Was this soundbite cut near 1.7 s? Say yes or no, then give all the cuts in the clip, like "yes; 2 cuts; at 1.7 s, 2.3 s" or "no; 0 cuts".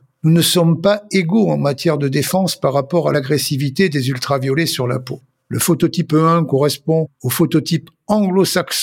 no; 1 cut; at 5.4 s